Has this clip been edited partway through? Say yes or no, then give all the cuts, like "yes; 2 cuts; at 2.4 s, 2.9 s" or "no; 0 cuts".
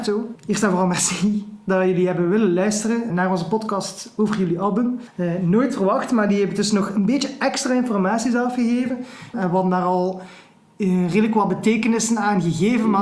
yes; 2 cuts; at 3.1 s, 9.3 s